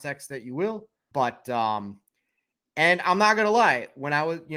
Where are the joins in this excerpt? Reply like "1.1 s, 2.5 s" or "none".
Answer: 1.1 s